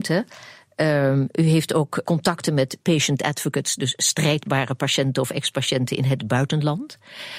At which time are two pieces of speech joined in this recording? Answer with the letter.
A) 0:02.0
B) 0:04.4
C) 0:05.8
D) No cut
A